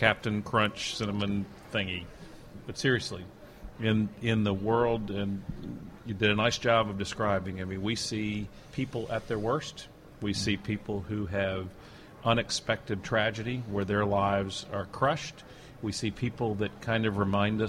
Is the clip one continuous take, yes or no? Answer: no